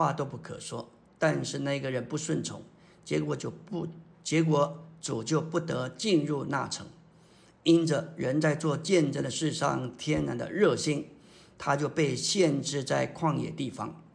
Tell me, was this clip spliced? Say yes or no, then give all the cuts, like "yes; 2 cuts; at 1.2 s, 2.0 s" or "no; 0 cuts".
no; 0 cuts